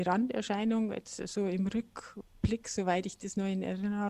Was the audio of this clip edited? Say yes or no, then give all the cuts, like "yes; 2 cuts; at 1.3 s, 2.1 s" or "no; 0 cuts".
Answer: no; 0 cuts